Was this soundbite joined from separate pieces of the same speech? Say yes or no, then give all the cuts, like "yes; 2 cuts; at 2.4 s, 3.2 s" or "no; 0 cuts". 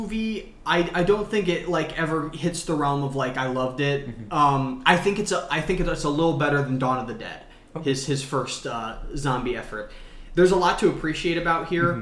no; 0 cuts